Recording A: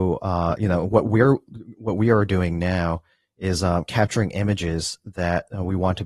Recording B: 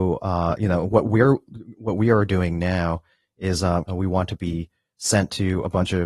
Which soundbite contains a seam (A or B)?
B